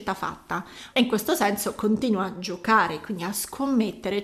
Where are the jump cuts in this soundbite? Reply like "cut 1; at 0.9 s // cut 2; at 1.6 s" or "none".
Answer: cut 1; at 0.9 s